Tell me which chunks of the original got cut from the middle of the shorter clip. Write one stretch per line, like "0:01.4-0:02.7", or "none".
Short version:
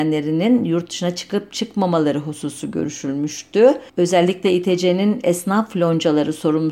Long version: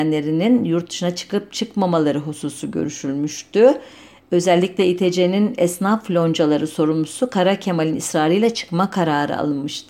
0:03.9-0:04.2